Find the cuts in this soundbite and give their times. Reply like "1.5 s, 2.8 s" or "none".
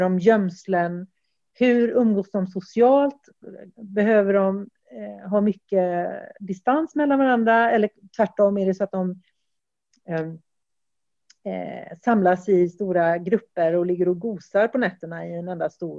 none

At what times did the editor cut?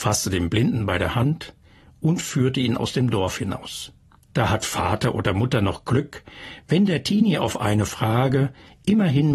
4.3 s

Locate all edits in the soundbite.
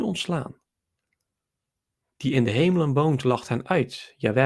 none

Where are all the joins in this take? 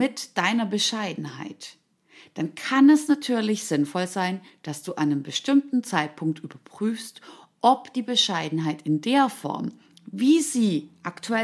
none

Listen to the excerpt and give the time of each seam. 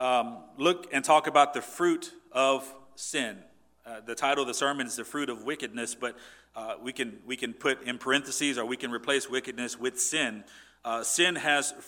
none

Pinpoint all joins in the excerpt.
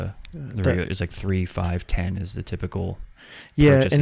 none

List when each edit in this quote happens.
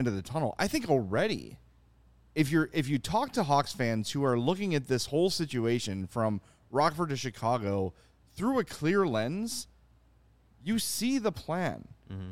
none

